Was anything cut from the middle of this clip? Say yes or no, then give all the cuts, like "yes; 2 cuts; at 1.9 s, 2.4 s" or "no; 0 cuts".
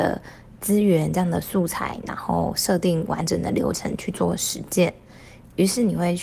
no; 0 cuts